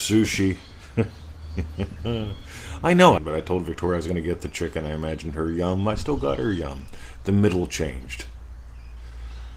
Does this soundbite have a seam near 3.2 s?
yes; 1 cut; at 3.2 s

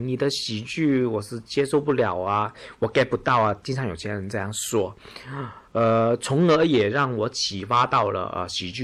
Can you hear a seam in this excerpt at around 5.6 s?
no; 0 cuts

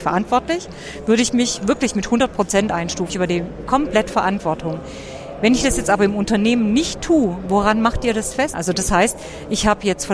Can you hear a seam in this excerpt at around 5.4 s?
no; 2 cuts; at 3.1 s, 8.5 s

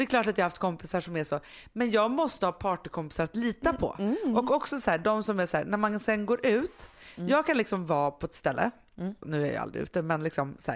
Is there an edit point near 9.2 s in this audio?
yes; 1 cut; at 9.2 s

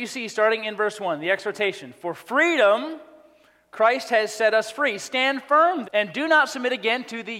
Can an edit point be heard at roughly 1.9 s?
no; 1 cut; at 5.8 s

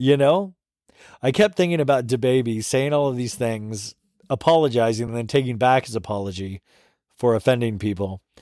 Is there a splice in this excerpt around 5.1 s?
no; 0 cuts

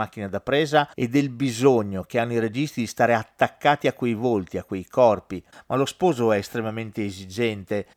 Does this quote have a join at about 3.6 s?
no; 2 cuts; at 0.9 s, 5.5 s

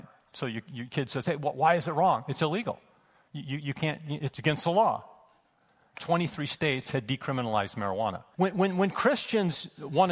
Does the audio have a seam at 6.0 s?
yes; 2 cuts; at 6.0 s, 8.3 s

